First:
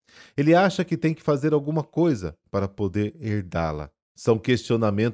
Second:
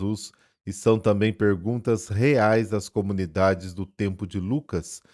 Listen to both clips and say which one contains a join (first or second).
first